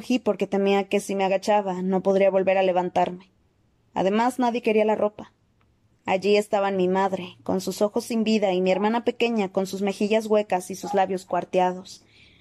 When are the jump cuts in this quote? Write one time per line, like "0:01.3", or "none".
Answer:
0:06.0